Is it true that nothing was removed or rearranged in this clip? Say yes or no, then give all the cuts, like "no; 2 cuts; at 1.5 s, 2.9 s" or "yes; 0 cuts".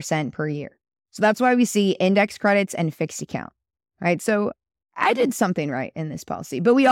yes; 0 cuts